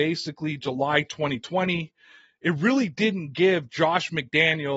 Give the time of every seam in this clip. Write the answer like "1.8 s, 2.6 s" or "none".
none